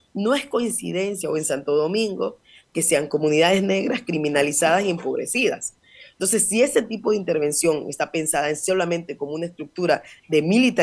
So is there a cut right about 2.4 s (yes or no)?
no